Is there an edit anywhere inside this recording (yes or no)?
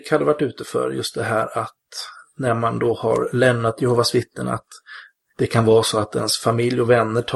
no